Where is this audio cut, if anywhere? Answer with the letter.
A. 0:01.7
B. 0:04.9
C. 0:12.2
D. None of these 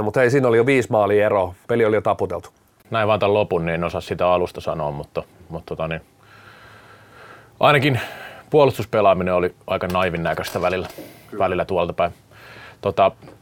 D